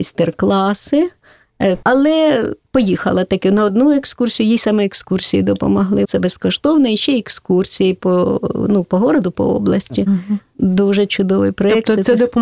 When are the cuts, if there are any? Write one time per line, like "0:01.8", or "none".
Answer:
0:01.8
0:06.0